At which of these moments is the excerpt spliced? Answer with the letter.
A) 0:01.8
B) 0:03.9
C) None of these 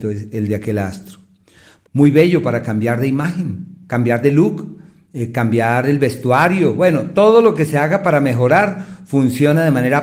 A